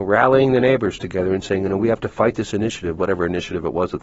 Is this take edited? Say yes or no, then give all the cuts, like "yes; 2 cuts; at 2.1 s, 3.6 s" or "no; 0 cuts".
no; 0 cuts